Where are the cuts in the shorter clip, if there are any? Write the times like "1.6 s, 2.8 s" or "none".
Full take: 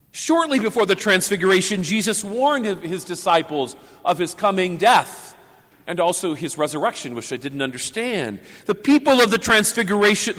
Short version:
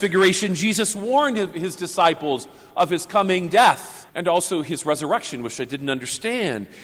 4.1 s